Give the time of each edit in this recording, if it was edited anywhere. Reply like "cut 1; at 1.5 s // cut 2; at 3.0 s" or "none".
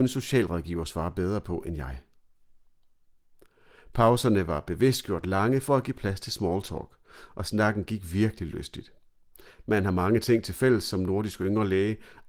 none